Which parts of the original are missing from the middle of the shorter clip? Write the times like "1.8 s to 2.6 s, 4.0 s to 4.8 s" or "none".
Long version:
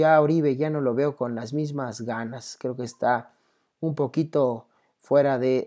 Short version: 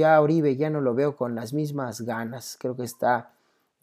none